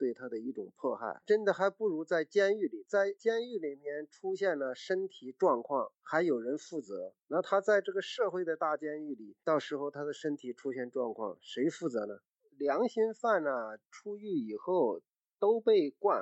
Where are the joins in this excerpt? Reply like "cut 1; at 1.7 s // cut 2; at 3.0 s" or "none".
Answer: cut 1; at 12.4 s

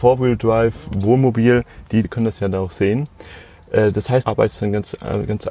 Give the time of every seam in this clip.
cut 1; at 2.0 s // cut 2; at 4.2 s

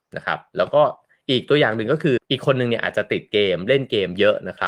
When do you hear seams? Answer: cut 1; at 2.2 s

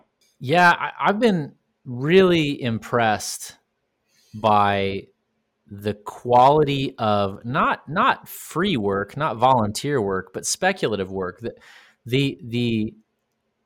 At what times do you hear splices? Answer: none

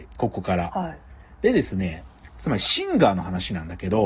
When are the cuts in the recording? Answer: none

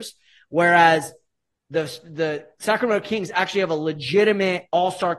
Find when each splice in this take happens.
none

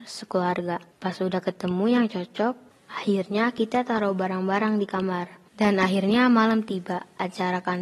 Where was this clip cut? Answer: cut 1; at 5.5 s

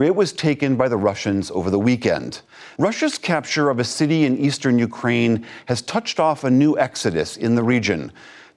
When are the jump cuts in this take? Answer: cut 1; at 2.8 s

